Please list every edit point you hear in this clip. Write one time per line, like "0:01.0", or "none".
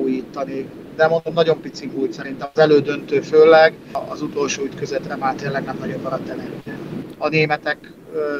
0:07.2